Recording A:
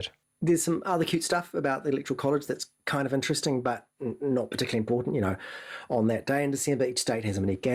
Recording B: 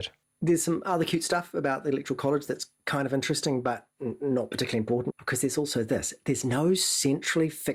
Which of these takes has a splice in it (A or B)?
B